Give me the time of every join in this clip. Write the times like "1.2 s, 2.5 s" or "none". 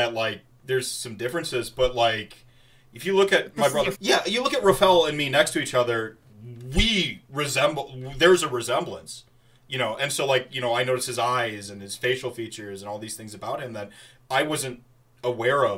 3.9 s